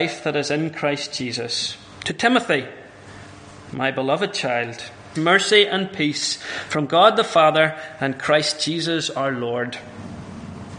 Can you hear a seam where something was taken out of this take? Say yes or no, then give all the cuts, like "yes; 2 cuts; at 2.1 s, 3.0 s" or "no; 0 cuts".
yes; 1 cut; at 5.1 s